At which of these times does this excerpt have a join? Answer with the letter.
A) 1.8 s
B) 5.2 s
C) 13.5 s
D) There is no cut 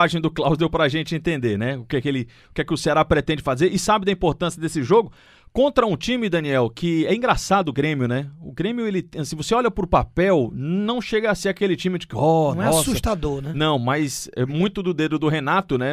D